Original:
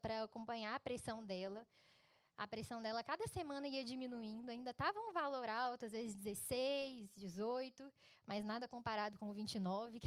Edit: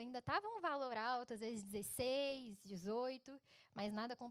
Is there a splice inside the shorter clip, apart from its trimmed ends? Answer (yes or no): no